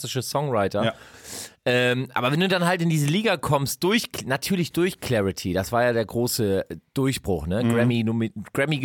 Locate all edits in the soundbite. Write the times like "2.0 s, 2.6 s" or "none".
none

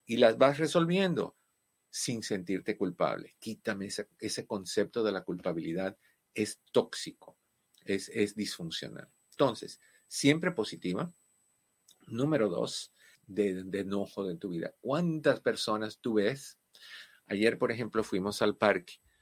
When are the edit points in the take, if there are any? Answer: 13.1 s

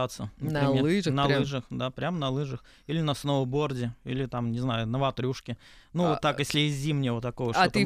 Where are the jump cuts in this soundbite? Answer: none

